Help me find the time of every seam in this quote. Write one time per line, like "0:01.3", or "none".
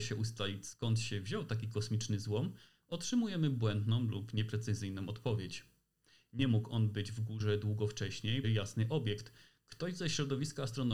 0:08.4